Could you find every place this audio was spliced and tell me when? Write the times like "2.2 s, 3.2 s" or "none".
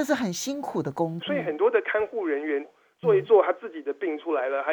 1.2 s, 2.6 s

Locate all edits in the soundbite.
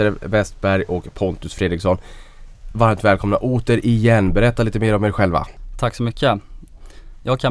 none

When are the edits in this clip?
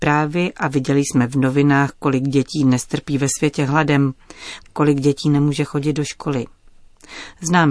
4.6 s

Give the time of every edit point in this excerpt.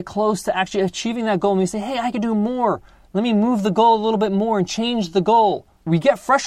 none

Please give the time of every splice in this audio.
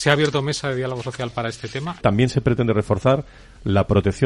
2.0 s

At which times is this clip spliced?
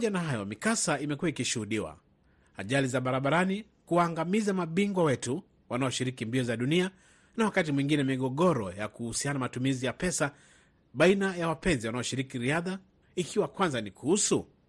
13.0 s

